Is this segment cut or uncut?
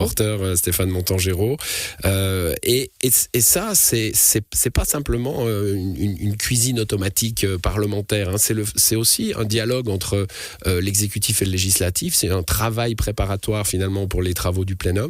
uncut